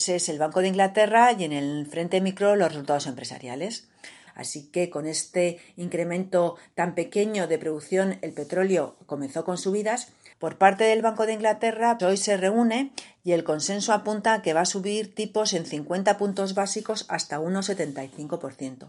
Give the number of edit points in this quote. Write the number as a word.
three